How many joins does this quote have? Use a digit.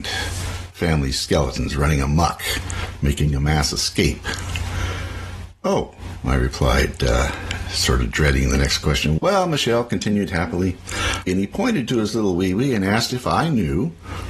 2